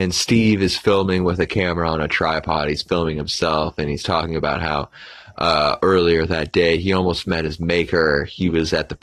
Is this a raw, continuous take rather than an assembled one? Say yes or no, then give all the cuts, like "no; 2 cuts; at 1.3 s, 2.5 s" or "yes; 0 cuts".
yes; 0 cuts